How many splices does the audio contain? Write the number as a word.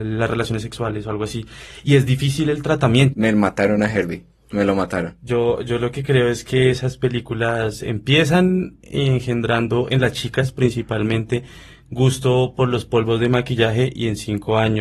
one